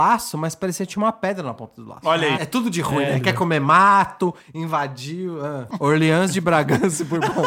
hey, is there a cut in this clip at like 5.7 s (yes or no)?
yes